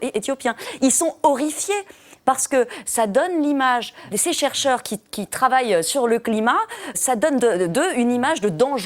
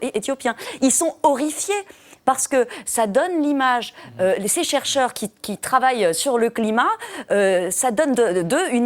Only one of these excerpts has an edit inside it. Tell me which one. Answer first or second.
first